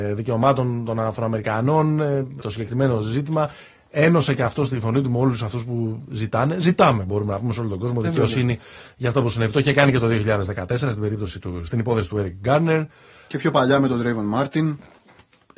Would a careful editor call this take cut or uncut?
cut